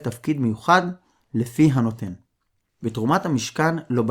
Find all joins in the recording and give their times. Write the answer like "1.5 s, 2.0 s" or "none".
none